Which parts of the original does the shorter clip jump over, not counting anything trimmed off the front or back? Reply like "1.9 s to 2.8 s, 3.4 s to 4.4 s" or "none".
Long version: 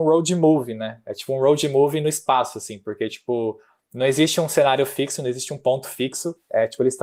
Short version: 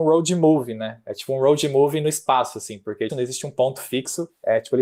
3.1 s to 5.2 s